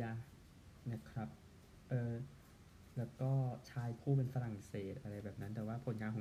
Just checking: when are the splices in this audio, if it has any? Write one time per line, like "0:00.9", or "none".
none